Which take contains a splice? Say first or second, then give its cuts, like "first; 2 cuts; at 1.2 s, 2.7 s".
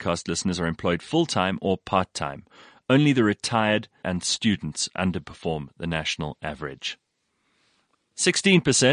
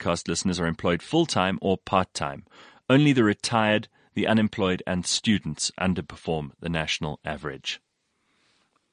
first; 1 cut; at 4.0 s